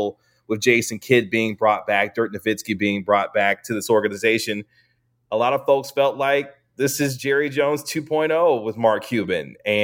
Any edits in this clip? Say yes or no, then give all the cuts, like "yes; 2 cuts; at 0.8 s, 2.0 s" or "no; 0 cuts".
no; 0 cuts